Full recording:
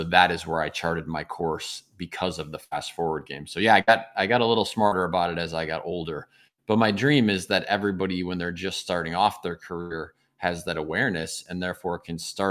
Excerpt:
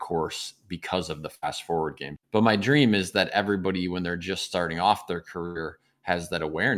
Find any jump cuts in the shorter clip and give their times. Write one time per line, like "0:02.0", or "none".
0:02.2